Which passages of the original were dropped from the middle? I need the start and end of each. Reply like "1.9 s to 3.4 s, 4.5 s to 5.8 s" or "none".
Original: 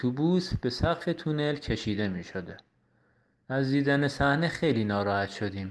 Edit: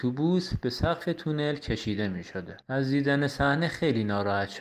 2.6 s to 3.4 s